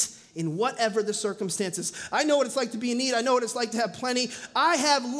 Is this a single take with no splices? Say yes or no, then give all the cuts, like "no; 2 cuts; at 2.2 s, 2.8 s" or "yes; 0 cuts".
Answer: yes; 0 cuts